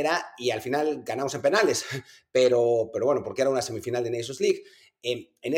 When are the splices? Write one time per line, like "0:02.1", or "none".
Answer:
none